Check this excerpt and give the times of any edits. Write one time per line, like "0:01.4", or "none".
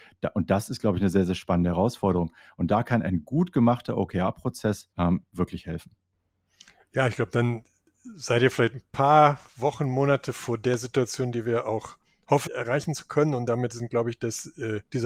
0:04.9
0:12.5

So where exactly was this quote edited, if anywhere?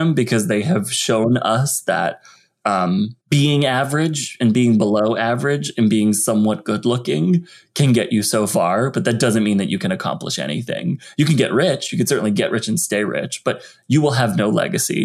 0:03.2

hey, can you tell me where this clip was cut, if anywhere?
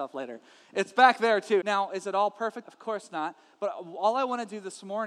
0:01.6
0:02.6

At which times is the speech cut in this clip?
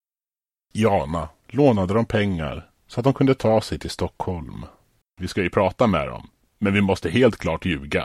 0:01.4
0:02.8
0:05.0

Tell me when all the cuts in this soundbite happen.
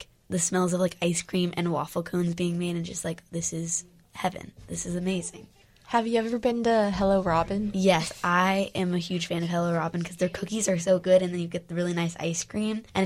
none

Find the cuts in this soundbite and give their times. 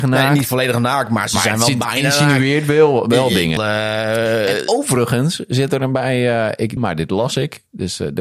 0:03.6
0:06.8

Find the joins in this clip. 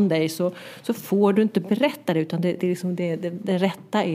none

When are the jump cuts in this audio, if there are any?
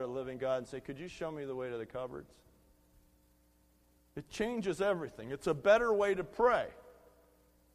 0:04.0

